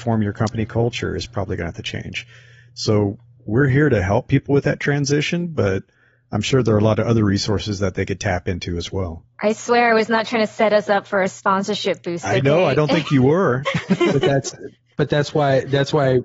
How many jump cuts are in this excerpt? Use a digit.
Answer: 0